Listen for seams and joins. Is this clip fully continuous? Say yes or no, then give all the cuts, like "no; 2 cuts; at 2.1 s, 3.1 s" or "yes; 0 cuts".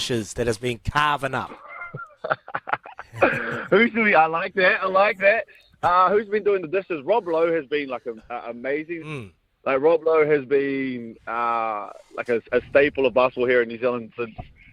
no; 1 cut; at 9.0 s